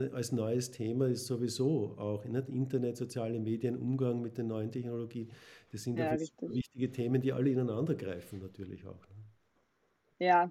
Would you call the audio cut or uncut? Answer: uncut